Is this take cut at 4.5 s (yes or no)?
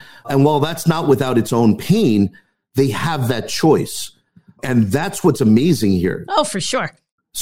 no